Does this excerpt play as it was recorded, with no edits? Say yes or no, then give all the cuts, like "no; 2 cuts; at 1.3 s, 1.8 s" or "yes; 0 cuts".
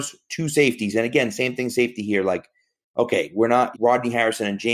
no; 1 cut; at 3.7 s